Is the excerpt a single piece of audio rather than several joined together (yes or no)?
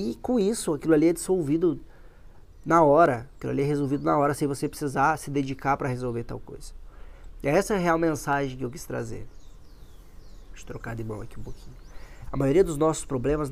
no